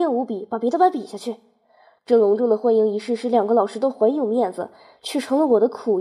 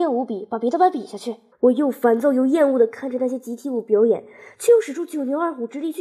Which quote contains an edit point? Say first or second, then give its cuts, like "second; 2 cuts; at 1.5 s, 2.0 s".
second; 1 cut; at 1.5 s